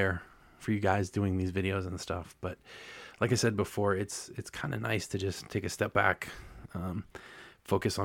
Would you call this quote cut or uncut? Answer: uncut